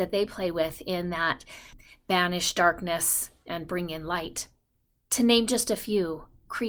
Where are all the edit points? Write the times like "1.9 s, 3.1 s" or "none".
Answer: 5.0 s